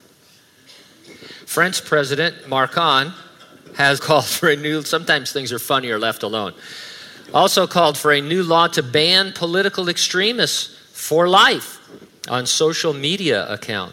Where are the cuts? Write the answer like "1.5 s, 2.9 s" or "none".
4.0 s